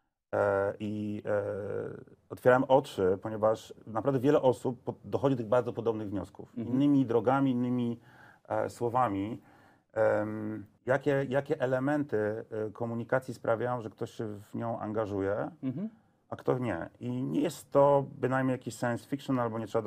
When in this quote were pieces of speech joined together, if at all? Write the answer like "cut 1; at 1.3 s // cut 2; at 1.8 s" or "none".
cut 1; at 10.8 s